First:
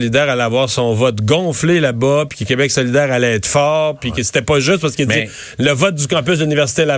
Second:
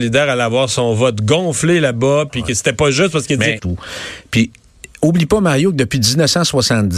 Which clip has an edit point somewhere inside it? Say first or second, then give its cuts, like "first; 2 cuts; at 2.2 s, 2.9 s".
second; 2 cuts; at 2.3 s, 3.6 s